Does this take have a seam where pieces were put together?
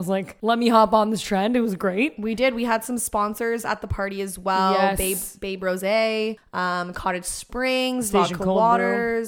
no; 0 cuts

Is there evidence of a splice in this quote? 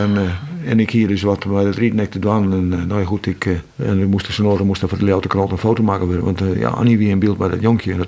yes; 1 cut; at 3.7 s

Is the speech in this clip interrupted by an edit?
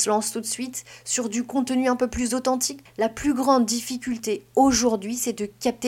yes; 1 cut; at 2.9 s

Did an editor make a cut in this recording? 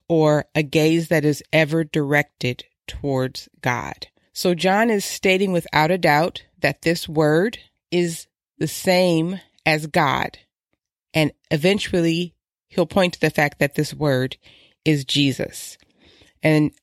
yes; 1 cut; at 4.2 s

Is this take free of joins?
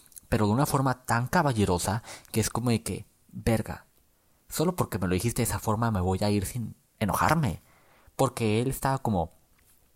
yes; 0 cuts

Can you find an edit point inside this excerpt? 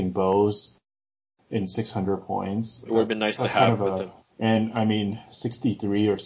yes; 2 cuts; at 2.9 s, 4.3 s

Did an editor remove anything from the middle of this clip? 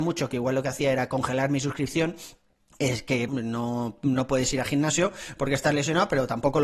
yes; 1 cut; at 3.3 s

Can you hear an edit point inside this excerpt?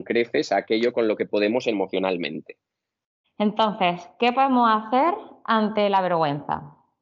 yes; 1 cut; at 3.2 s

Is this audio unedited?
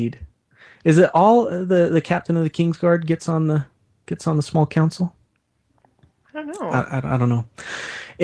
yes; 0 cuts

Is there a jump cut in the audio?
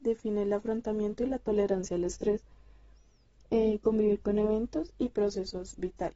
no; 0 cuts

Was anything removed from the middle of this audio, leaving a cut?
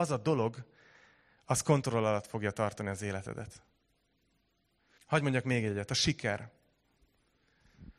yes; 1 cut; at 5.0 s

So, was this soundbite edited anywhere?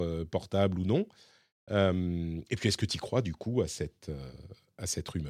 no; 0 cuts

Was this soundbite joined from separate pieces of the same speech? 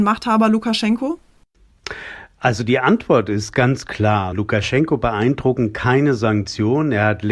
yes; 1 cut; at 4.3 s

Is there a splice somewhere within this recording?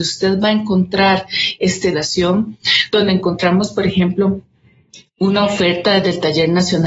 yes; 1 cut; at 1.9 s

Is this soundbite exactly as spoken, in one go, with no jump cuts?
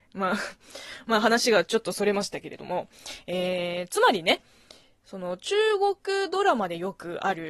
yes; 0 cuts

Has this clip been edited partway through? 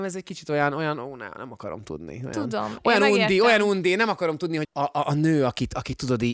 yes; 1 cut; at 4.6 s

